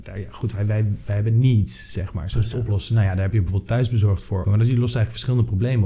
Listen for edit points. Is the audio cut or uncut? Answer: cut